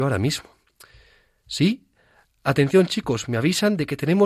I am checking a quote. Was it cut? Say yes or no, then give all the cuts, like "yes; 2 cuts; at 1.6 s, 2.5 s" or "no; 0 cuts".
no; 0 cuts